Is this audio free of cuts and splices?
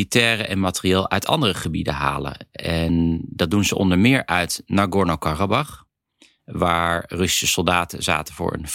yes; 0 cuts

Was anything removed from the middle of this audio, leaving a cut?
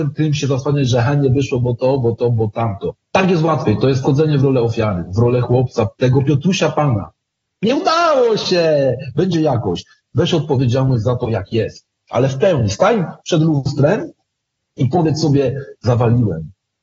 no; 0 cuts

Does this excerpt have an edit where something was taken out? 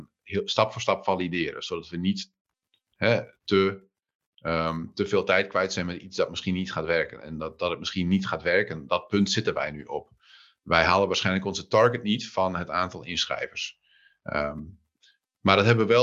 no; 0 cuts

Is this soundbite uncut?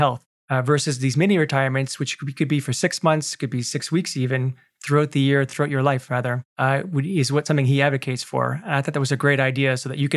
yes; 0 cuts

